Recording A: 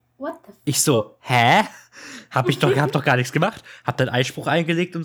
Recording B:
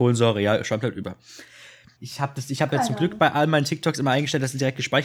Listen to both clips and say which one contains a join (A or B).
B